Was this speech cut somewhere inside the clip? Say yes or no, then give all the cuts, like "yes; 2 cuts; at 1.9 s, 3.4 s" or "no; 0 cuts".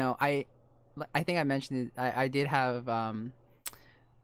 no; 0 cuts